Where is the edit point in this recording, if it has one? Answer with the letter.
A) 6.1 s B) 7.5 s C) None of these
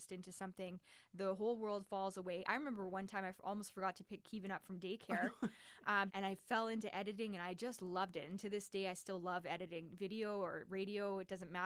A